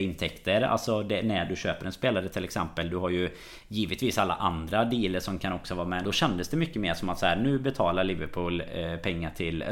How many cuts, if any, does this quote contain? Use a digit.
1